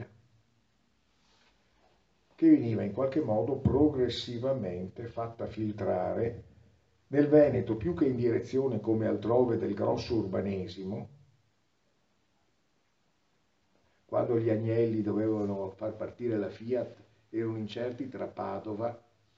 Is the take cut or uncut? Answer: uncut